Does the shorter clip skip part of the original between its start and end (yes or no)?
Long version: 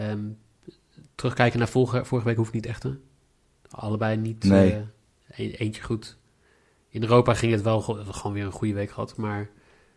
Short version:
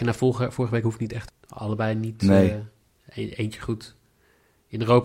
yes